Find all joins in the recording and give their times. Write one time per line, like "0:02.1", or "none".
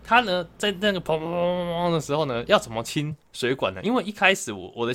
none